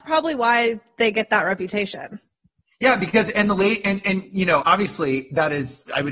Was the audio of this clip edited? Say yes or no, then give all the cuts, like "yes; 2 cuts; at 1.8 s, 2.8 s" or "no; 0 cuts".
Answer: yes; 1 cut; at 4.6 s